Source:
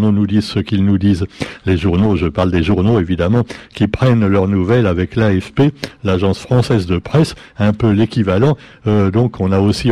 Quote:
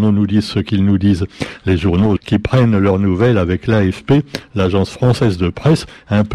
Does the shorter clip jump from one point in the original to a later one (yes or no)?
yes